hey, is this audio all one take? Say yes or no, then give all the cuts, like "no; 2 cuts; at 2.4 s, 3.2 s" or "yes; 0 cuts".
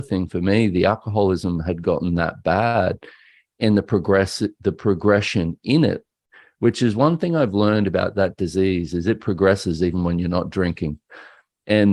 yes; 0 cuts